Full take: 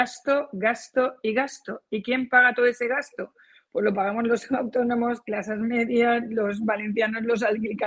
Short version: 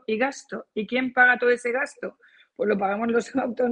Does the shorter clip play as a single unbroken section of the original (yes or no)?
yes